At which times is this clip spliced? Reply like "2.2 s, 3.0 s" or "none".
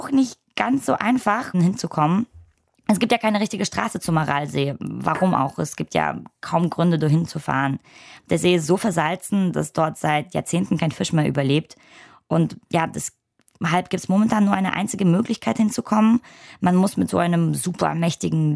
1.5 s